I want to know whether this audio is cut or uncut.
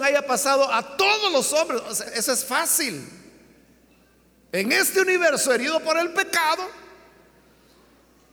cut